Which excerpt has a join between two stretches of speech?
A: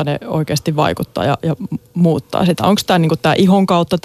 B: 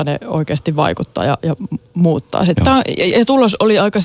B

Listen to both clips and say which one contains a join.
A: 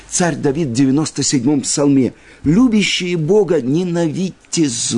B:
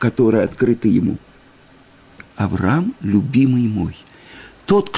B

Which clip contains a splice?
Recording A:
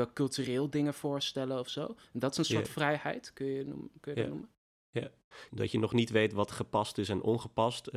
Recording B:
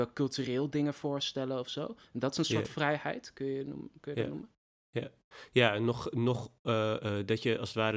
A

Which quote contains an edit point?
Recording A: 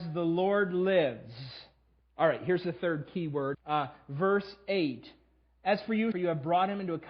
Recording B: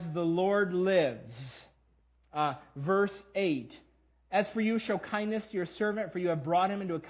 A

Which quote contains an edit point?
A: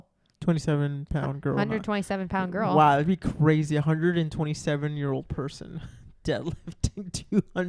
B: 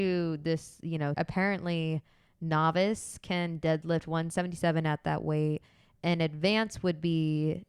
B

